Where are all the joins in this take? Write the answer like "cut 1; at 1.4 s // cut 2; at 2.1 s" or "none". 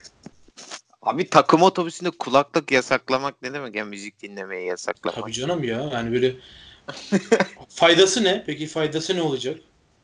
none

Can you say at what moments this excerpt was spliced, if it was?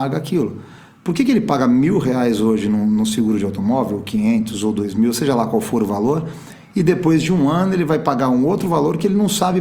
none

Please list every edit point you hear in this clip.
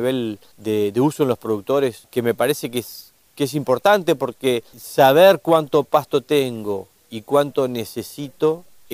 none

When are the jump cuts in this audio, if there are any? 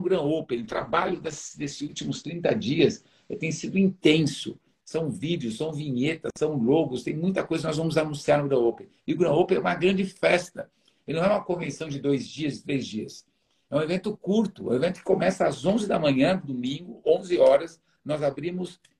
cut 1; at 4.8 s

